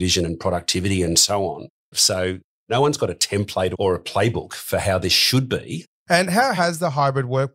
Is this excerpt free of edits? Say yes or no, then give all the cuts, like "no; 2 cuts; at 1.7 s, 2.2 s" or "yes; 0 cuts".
no; 2 cuts; at 1.9 s, 5.9 s